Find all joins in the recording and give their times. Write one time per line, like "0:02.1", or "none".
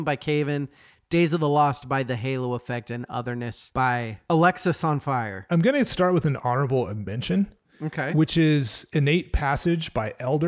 none